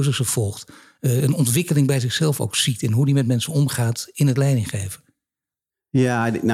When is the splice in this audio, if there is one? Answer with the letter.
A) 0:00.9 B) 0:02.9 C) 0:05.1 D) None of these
D